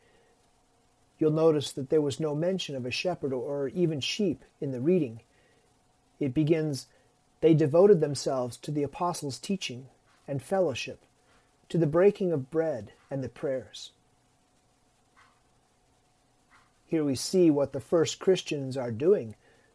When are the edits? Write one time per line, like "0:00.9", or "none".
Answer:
none